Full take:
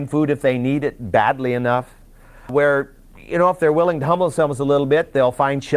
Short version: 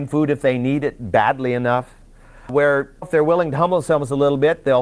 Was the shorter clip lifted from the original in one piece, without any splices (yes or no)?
no